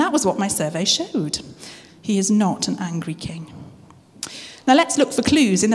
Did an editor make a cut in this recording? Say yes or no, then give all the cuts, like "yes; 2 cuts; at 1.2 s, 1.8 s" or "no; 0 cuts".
yes; 1 cut; at 1.9 s